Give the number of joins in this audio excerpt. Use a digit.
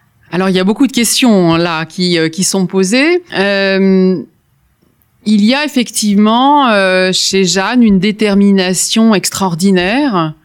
1